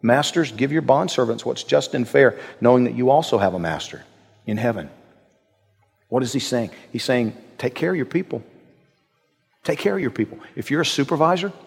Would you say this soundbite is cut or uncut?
uncut